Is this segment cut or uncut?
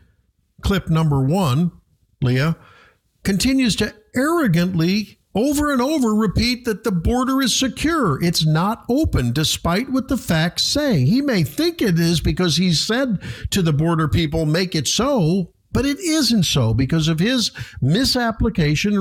cut